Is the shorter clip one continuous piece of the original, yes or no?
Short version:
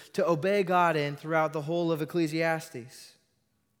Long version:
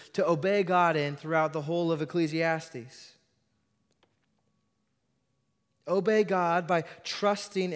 yes